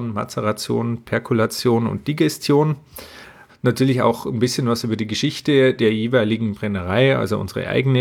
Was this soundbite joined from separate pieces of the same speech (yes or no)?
yes